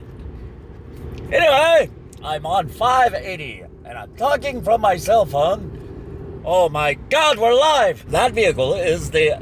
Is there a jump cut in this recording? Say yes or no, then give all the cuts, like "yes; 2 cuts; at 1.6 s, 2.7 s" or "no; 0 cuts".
yes; 3 cuts; at 2.2 s, 6.4 s, 8.1 s